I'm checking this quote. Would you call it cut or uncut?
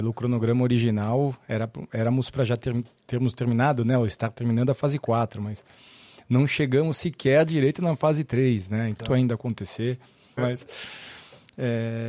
cut